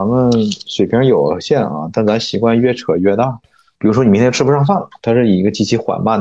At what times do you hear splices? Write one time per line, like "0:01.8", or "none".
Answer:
0:03.8
0:05.0